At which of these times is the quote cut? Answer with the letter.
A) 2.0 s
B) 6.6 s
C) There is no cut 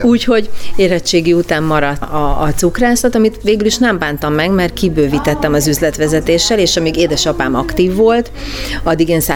A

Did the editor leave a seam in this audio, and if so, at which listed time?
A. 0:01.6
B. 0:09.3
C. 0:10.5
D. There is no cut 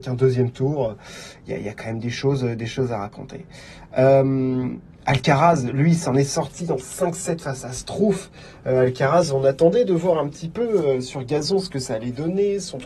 D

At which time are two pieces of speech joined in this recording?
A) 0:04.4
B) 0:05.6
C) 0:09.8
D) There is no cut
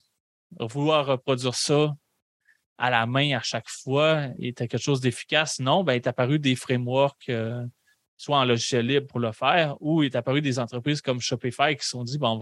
A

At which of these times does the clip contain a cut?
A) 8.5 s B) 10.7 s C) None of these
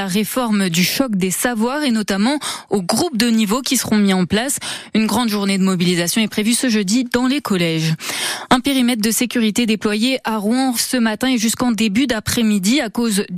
B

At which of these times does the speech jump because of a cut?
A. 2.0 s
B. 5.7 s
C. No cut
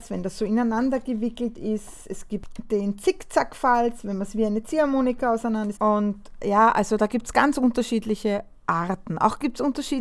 B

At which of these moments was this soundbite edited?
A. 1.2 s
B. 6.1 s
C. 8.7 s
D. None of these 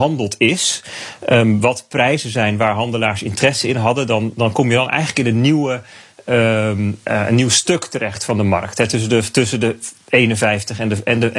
D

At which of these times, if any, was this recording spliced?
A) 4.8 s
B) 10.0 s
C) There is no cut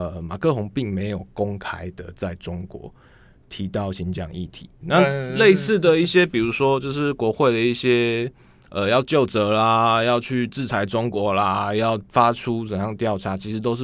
A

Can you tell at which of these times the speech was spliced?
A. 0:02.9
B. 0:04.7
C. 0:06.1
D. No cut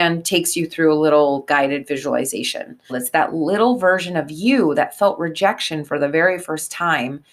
A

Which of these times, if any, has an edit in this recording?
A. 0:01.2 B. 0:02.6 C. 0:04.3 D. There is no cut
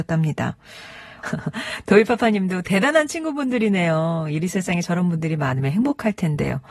A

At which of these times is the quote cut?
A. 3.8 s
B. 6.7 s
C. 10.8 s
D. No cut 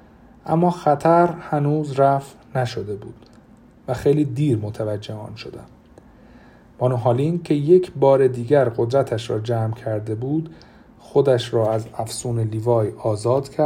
D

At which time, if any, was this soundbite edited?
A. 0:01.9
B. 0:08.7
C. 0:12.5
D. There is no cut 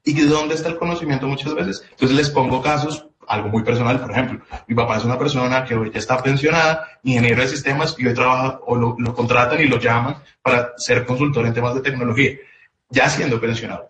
A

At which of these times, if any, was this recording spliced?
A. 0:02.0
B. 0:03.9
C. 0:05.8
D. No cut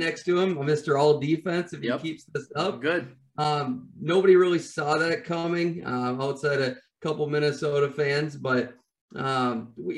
D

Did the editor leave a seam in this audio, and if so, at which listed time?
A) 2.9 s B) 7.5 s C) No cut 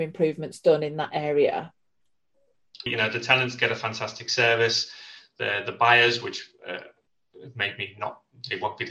A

